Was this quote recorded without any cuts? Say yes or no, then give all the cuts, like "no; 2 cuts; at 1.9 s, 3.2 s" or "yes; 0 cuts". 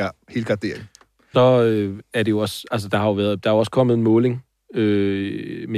no; 1 cut; at 1.3 s